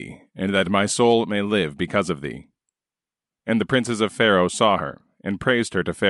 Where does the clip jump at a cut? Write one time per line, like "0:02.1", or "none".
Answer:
0:03.3